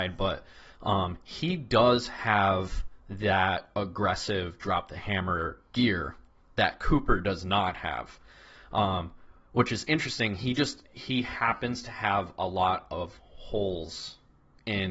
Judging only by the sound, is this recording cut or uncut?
uncut